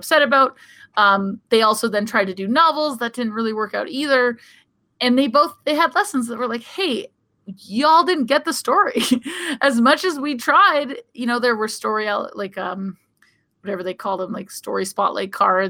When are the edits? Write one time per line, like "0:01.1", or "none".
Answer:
0:07.4